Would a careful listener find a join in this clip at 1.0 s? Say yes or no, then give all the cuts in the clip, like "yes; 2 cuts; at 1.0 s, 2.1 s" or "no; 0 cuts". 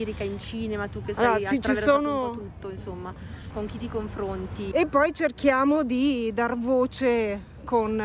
no; 2 cuts; at 3.5 s, 4.7 s